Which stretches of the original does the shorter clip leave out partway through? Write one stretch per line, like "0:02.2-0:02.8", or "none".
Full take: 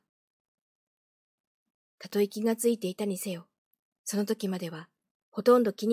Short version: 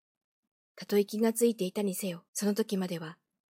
0:03.5-0:04.0